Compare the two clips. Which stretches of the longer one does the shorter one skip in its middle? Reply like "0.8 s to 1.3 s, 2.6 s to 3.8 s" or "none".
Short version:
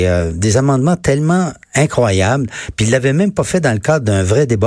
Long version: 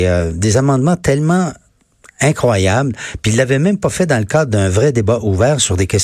1.6 s to 2.1 s